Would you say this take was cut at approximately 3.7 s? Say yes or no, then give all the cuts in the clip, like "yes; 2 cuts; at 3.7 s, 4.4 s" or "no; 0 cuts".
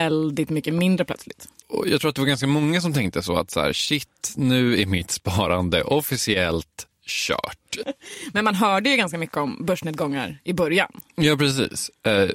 no; 2 cuts; at 1.6 s, 7.8 s